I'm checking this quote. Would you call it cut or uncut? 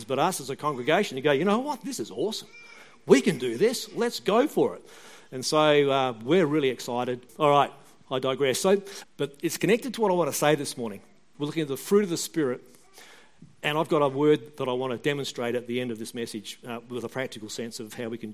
cut